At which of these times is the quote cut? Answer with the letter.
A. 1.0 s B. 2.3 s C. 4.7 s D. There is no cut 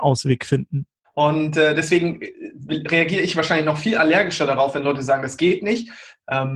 A